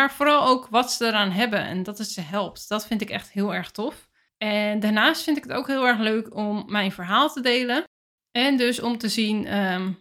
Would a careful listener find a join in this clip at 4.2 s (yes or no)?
no